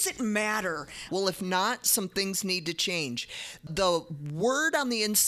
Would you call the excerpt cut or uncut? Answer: cut